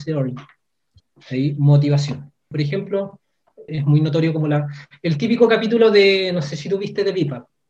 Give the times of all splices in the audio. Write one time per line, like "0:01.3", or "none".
0:01.0
0:02.5
0:03.7